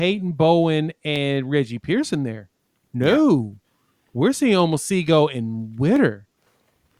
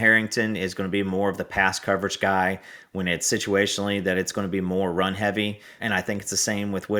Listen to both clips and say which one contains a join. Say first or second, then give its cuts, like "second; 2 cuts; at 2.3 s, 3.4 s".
second; 1 cut; at 5.8 s